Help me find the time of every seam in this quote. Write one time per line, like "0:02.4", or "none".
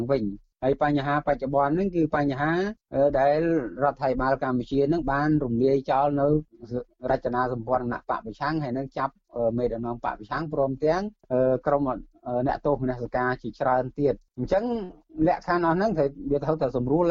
none